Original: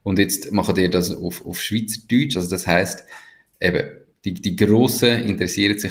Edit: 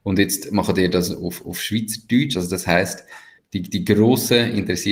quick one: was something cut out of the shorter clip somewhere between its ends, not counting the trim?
yes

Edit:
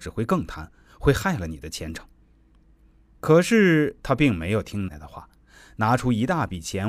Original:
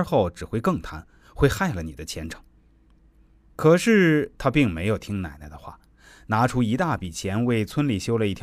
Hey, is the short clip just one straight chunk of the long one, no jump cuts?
no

